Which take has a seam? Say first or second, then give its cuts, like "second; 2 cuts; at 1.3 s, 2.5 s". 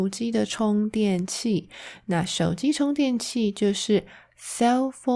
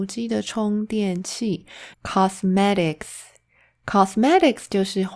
second; 1 cut; at 1.9 s